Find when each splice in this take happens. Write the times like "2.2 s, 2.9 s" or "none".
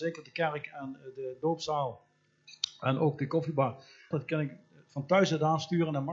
4.1 s